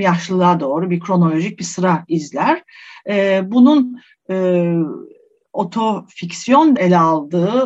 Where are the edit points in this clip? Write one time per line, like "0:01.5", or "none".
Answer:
0:06.8